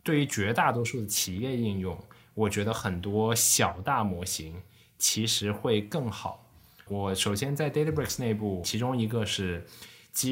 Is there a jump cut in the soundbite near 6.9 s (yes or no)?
yes